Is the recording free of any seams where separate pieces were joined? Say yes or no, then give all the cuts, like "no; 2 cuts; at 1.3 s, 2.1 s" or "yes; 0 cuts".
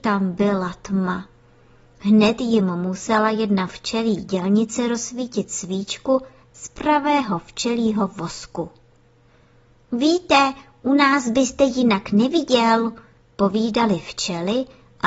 yes; 0 cuts